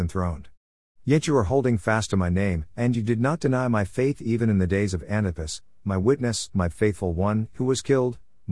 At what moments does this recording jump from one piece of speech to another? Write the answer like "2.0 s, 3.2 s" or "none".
none